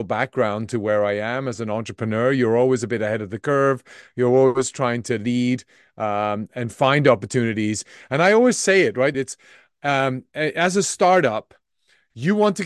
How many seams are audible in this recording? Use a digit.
1